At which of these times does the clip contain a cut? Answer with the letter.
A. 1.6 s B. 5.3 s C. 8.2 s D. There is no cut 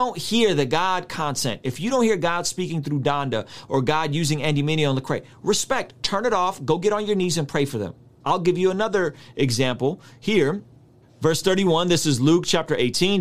C